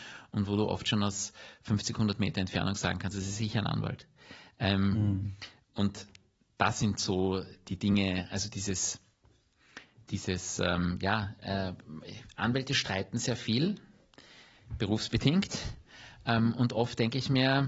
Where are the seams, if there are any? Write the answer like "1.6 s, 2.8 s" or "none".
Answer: none